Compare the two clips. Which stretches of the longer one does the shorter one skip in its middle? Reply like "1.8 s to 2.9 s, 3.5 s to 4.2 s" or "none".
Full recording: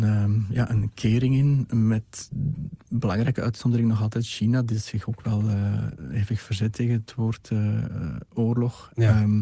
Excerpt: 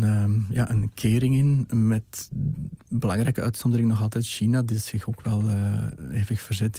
none